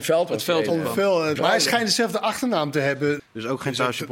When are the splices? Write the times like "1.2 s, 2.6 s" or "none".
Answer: 1.4 s, 3.2 s